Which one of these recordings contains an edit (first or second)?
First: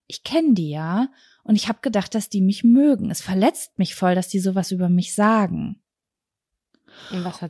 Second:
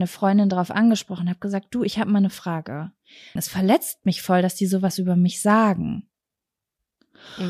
second